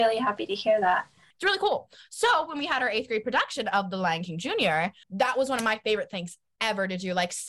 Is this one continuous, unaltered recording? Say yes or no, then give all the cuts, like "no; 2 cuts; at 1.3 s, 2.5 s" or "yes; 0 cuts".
no; 2 cuts; at 1.3 s, 5.0 s